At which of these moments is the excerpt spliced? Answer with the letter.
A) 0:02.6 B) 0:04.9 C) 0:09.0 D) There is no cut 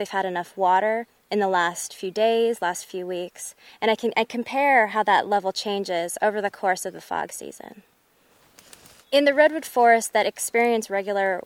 C